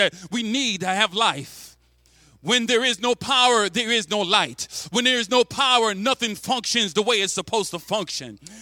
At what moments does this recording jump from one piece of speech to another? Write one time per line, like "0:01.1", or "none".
none